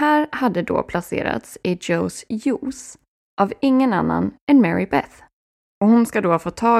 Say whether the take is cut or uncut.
uncut